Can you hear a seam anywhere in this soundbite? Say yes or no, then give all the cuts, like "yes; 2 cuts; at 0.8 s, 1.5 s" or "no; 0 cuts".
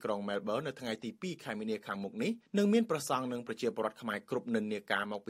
yes; 1 cut; at 2.5 s